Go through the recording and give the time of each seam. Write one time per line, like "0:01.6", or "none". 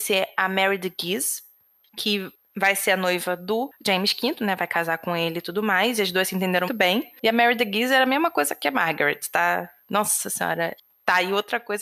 0:06.7

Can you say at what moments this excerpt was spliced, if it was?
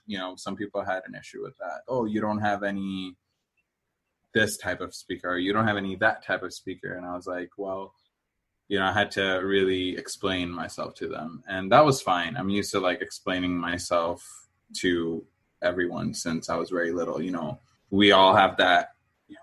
0:01.8

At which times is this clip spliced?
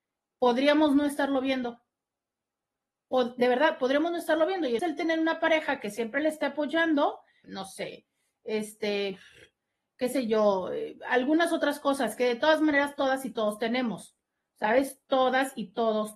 0:04.8
0:07.4

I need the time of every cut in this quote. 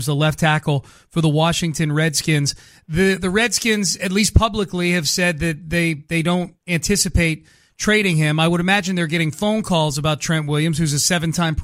none

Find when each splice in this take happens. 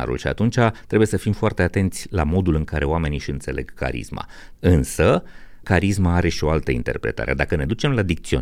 0:04.6
0:05.6

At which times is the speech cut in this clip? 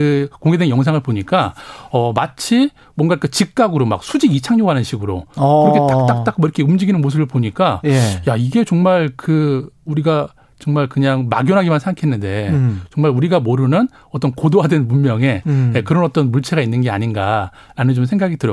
none

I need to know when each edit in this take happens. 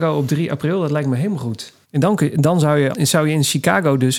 0:01.8
0:02.9

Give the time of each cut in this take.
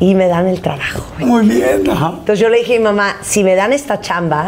0:01.2

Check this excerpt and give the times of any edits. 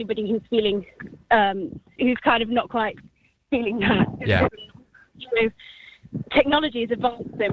0:02.0
0:04.5

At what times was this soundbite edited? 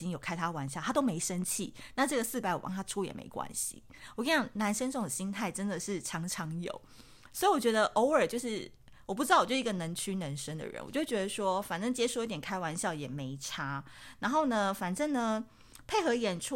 none

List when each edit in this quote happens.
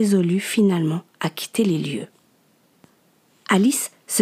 none

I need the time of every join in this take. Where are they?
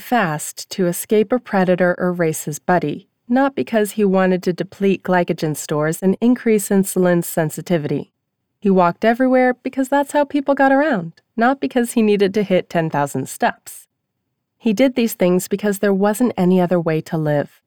none

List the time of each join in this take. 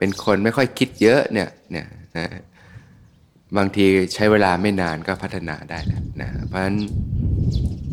0:02.2

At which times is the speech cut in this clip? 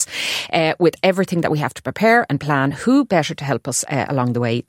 none

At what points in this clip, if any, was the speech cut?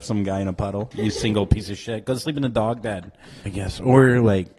0:00.9
0:03.5

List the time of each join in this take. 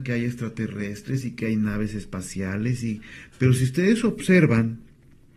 none

